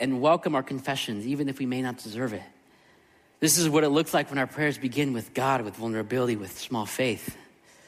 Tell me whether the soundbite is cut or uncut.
cut